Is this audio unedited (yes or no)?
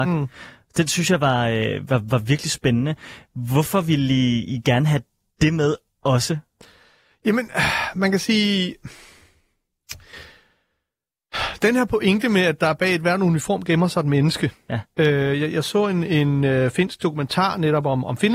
yes